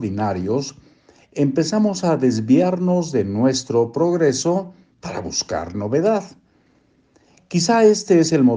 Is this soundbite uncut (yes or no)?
yes